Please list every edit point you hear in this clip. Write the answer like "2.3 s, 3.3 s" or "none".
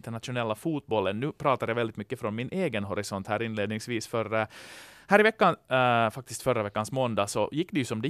none

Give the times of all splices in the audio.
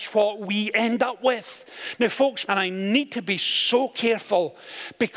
2.5 s

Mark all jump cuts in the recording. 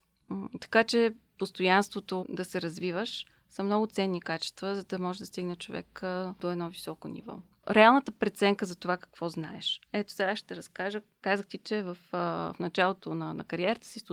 2.2 s

